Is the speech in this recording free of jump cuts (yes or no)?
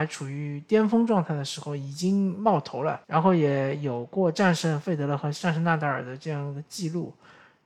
no